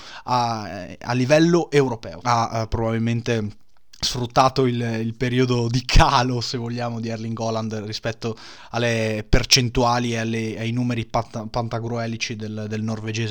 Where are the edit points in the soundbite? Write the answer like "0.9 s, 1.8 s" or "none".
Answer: 2.2 s